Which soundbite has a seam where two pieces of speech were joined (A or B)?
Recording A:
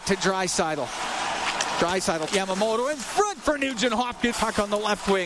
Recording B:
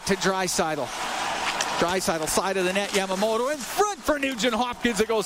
A